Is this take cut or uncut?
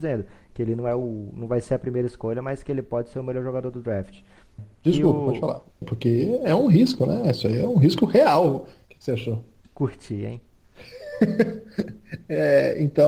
cut